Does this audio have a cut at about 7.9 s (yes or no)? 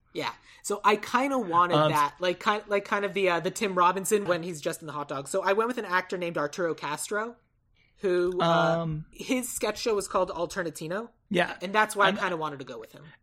no